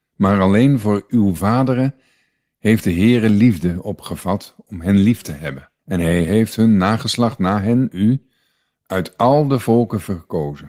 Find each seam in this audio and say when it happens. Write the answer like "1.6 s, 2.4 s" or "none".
5.8 s